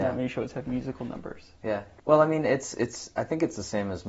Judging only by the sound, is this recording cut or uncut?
cut